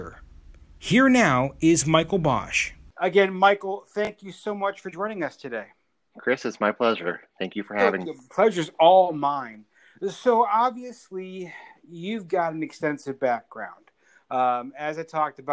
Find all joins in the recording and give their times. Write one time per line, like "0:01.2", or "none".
0:08.0